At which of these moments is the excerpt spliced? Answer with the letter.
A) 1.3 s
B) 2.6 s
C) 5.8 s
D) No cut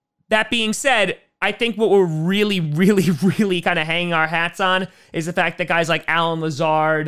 D